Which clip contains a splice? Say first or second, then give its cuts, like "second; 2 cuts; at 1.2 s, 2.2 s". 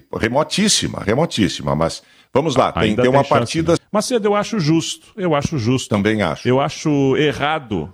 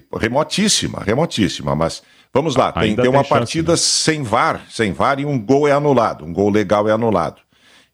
first; 1 cut; at 3.8 s